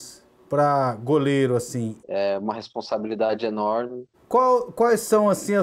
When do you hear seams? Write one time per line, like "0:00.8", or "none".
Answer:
0:02.0
0:04.1